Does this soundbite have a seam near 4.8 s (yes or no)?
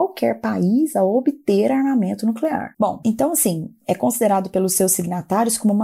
no